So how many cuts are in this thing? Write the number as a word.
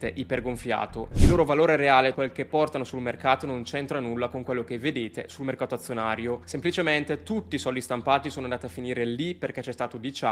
two